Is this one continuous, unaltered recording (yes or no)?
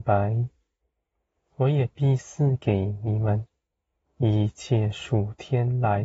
no